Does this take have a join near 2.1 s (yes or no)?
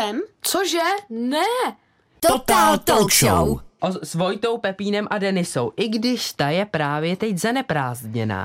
yes